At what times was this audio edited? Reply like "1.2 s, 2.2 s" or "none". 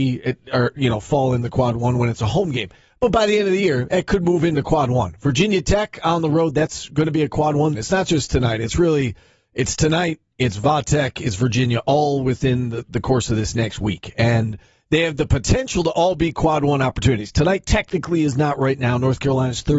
7.7 s